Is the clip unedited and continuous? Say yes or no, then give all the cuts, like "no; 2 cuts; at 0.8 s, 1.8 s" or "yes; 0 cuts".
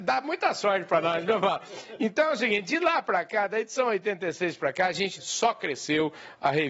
no; 1 cut; at 5.2 s